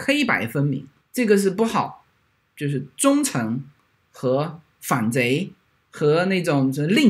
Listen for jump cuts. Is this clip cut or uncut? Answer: cut